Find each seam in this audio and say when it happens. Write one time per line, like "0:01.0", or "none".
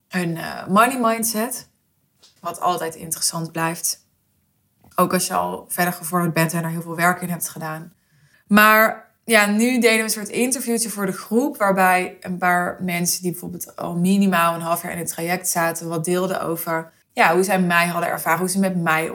0:08.3
0:17.0